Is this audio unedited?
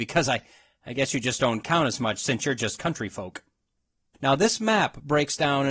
no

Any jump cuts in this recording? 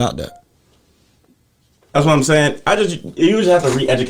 no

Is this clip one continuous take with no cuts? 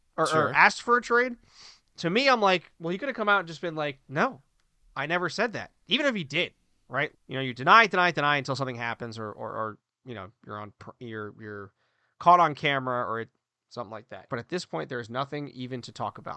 no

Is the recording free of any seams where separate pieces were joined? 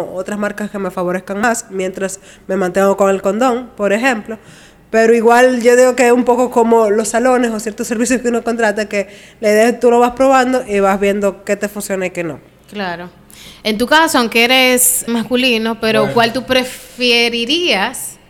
no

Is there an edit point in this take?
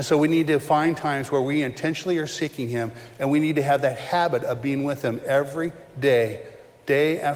no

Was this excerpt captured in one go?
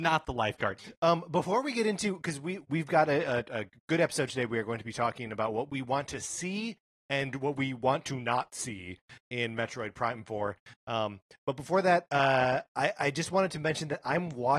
yes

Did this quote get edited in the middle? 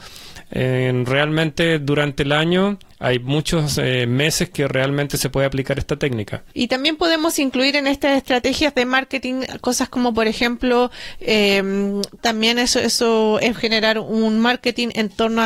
yes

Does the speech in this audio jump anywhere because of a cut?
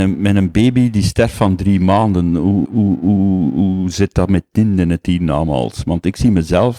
yes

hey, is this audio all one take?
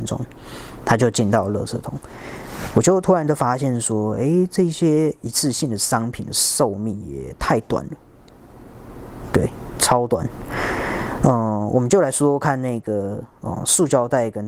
yes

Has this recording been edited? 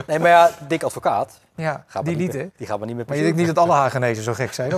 no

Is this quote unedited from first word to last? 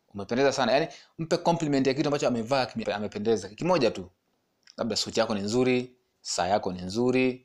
no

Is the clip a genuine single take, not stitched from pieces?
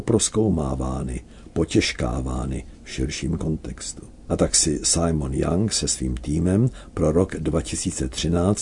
yes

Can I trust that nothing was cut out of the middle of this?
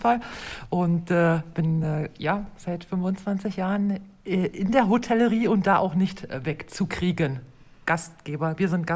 yes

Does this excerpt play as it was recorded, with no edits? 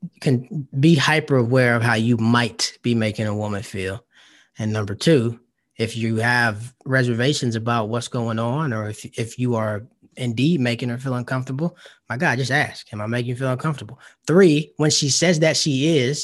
yes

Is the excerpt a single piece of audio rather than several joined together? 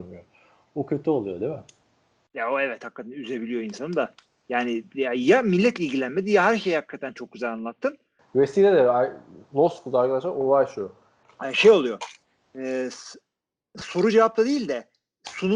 no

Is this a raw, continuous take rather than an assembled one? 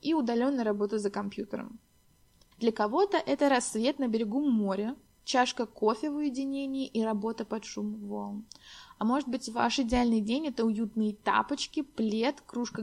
no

